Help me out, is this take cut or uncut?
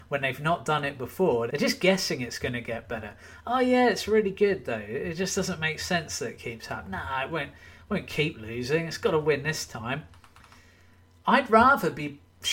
cut